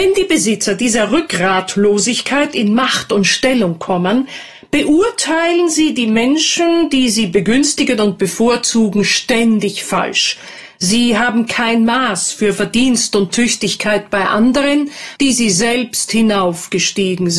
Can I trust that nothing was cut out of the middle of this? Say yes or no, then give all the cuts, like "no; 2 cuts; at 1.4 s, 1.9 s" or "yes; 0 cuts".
no; 1 cut; at 15.2 s